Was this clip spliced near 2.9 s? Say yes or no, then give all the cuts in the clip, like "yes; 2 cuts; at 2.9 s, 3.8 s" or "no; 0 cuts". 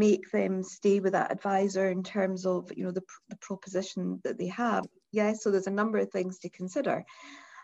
no; 1 cut; at 4.8 s